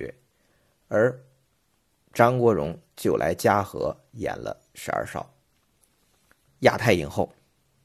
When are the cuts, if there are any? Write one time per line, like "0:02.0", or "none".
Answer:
0:06.5